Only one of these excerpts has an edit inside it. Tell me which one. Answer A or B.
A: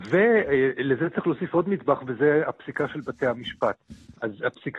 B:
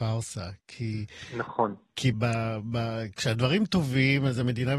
B